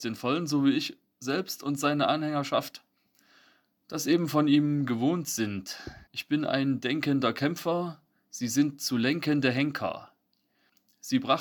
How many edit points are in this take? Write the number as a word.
one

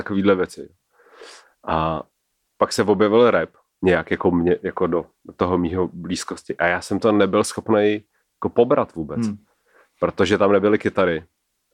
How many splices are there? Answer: zero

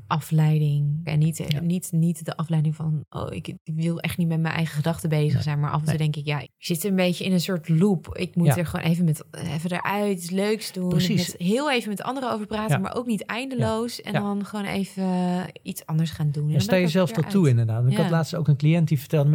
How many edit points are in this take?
two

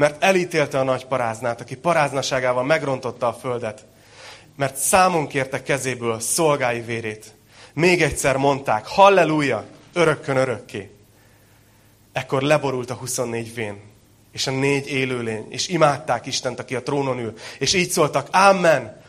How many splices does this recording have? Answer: one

